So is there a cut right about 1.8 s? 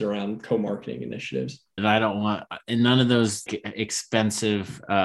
yes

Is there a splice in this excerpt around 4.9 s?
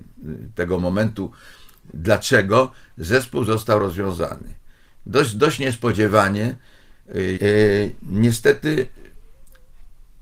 no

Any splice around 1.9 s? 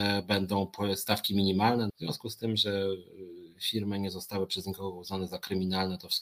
yes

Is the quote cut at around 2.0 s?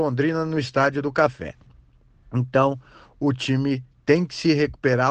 no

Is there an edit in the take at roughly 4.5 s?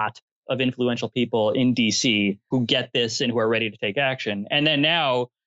no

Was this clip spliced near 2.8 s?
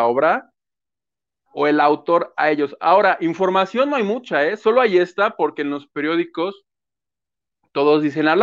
no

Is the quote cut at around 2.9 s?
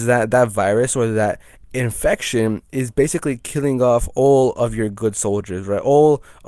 no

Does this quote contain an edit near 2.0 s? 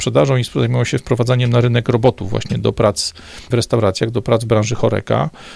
no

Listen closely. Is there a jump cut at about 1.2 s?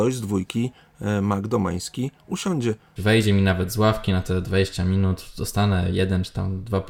no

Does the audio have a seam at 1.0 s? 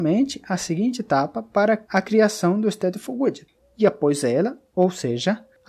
no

